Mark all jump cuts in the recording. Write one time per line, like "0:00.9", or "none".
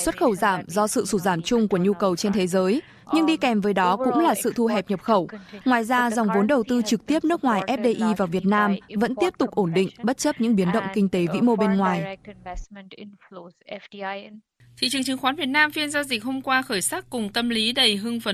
0:05.6

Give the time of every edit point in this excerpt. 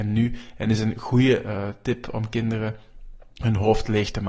none

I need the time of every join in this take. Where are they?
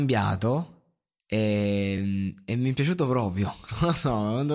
none

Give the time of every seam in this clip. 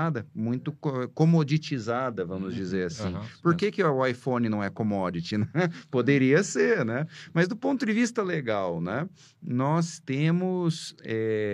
none

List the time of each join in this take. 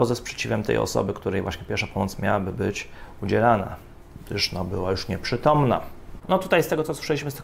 0:06.2

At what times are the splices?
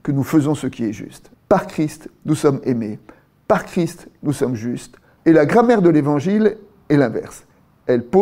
0:01.3
0:05.2

